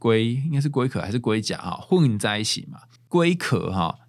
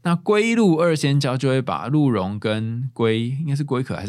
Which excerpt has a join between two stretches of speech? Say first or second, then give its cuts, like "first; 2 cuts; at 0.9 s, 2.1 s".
first; 1 cut; at 3.0 s